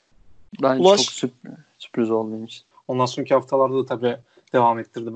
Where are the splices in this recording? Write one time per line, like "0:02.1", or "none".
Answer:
0:02.7

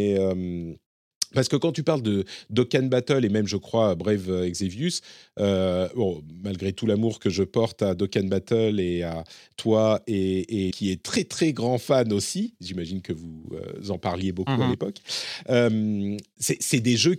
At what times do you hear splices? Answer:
0:10.7

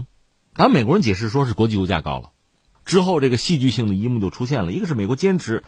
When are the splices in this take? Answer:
0:02.7

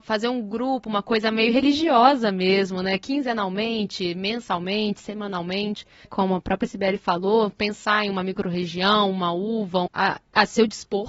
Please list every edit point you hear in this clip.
0:06.0
0:09.9

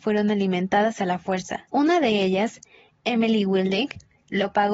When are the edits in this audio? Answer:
0:01.7

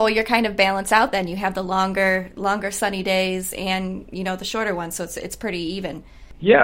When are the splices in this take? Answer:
none

